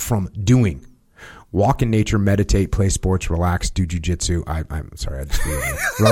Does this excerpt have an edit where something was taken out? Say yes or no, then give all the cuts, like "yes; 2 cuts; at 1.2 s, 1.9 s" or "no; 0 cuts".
no; 0 cuts